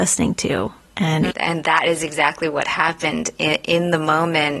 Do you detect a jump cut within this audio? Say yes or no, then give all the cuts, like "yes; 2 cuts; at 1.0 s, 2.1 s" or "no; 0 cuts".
yes; 1 cut; at 1.3 s